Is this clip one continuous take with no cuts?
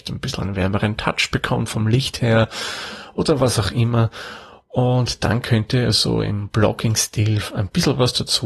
yes; 0 cuts

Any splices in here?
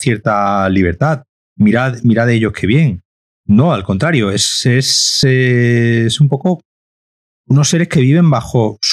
no; 0 cuts

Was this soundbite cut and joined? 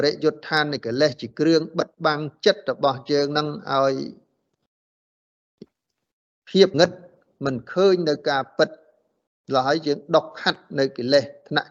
yes; 1 cut; at 6.7 s

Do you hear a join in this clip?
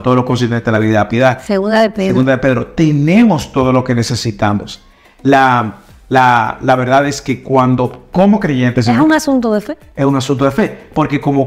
no; 0 cuts

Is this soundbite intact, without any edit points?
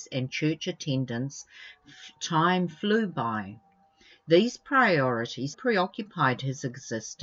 no; 1 cut; at 5.5 s

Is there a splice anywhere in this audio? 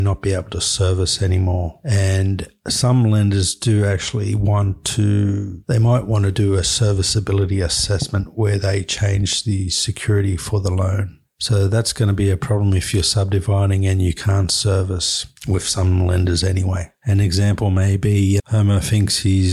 yes; 1 cut; at 18.4 s

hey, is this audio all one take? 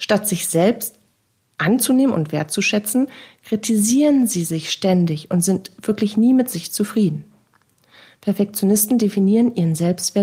yes; 0 cuts

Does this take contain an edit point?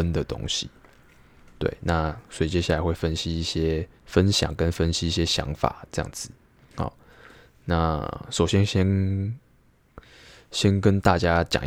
yes; 2 cuts; at 4.0 s, 6.7 s

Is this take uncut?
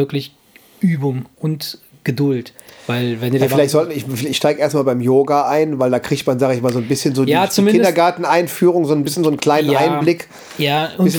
yes; 0 cuts

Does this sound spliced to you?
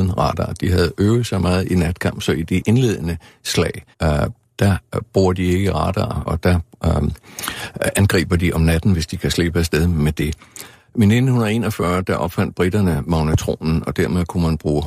yes; 2 cuts; at 3.9 s, 6.3 s

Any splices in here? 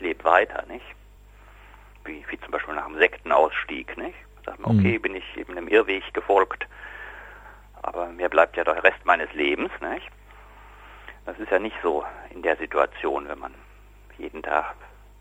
no; 0 cuts

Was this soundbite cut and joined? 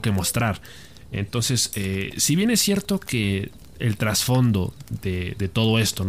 no; 0 cuts

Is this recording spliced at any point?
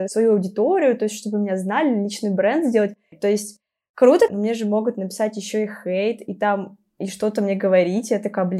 yes; 2 cuts; at 3.1 s, 4.3 s

